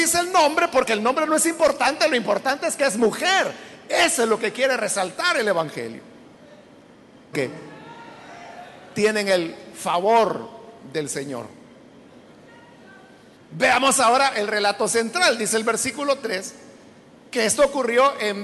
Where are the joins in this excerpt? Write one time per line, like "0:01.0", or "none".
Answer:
0:07.3
0:13.4